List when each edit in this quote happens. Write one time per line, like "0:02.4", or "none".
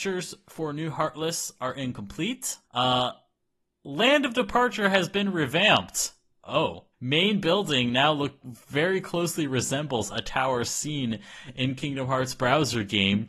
0:02.6
0:06.9
0:08.4